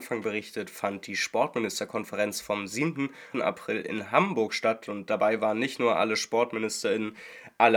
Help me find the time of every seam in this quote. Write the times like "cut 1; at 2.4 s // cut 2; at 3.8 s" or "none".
cut 1; at 3.3 s